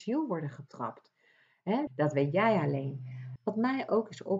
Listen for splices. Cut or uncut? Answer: cut